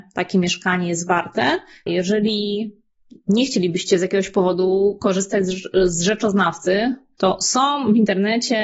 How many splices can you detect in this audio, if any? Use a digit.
2